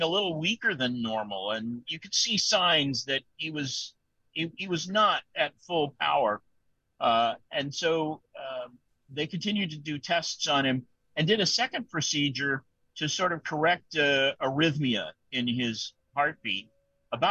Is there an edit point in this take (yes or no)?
no